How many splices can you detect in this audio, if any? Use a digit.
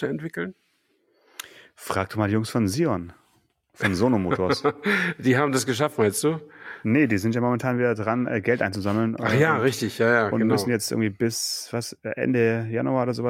0